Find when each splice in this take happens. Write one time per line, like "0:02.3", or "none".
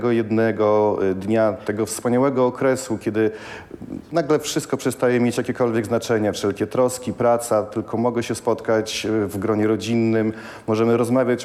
none